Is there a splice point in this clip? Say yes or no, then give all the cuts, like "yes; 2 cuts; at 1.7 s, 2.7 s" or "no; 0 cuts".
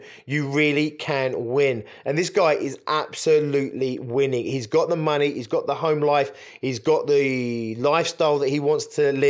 no; 0 cuts